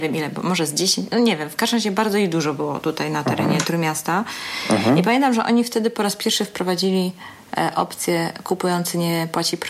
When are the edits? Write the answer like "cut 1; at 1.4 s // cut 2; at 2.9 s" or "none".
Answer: none